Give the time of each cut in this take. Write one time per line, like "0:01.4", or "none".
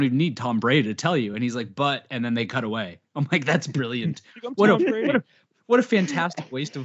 none